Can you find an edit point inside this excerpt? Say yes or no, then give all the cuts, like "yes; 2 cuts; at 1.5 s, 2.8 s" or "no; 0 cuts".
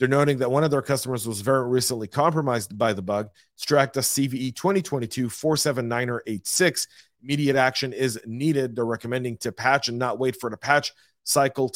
no; 0 cuts